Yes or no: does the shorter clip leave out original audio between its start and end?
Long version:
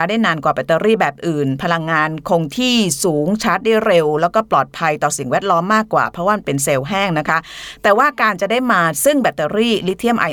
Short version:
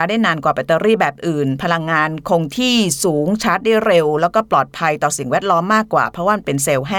no